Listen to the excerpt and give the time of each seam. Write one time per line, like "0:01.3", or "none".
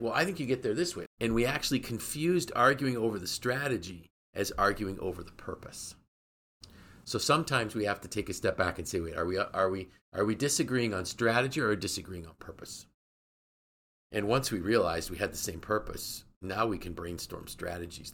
0:01.1